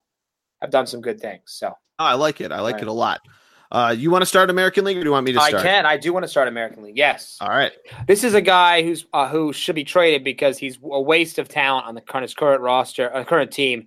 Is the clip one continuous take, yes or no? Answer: yes